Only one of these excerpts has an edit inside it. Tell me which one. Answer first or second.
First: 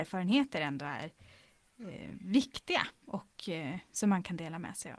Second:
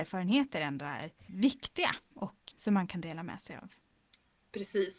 second